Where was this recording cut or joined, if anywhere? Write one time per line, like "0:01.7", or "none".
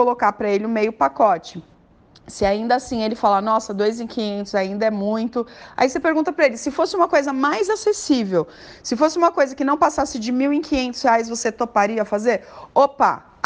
none